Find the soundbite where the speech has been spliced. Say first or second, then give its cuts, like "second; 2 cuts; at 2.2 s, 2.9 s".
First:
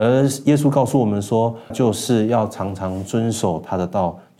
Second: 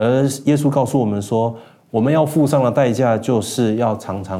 first; 1 cut; at 1.7 s